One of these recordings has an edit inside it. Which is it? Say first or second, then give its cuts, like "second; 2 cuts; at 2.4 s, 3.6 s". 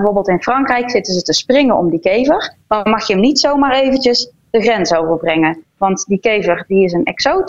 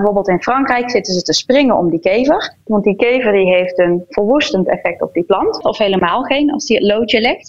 second; 2 cuts; at 2.7 s, 5.6 s